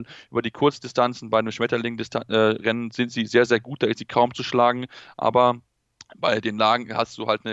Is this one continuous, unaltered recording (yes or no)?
yes